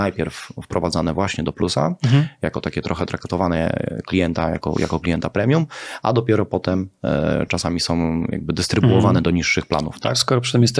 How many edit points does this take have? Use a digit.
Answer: 0